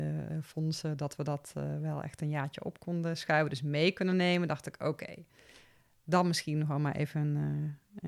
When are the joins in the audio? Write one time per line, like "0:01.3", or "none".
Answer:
none